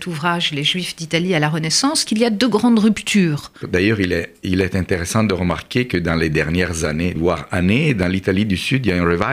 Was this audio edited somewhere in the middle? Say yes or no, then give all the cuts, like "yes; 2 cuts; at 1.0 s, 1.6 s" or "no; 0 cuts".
yes; 2 cuts; at 3.6 s, 7.2 s